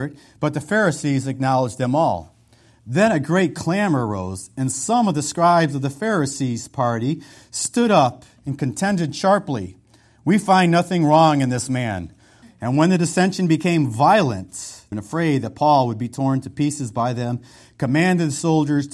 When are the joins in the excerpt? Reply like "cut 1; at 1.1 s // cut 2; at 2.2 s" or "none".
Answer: cut 1; at 12.4 s // cut 2; at 14.9 s